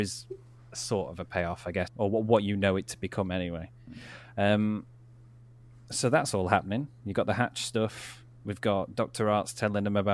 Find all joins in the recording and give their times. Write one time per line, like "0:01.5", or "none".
0:01.9